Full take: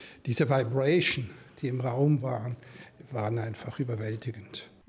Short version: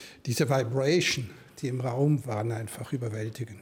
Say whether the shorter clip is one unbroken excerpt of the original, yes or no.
no